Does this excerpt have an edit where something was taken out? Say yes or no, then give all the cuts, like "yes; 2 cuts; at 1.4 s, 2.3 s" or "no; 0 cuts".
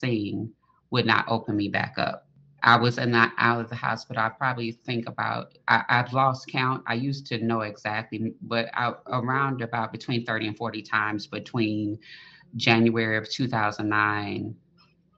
no; 0 cuts